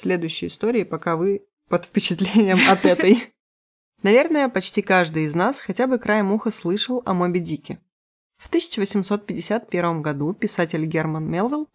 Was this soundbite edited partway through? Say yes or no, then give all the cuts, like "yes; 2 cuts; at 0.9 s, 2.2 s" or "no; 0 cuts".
no; 0 cuts